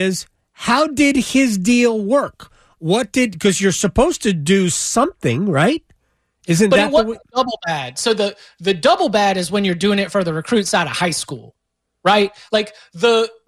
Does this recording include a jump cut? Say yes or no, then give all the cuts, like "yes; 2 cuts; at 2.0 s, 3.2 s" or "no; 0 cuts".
no; 0 cuts